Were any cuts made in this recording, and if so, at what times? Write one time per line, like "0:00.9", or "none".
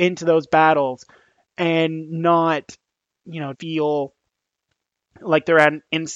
0:03.5